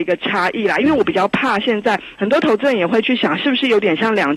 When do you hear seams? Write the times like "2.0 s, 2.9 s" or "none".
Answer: 2.2 s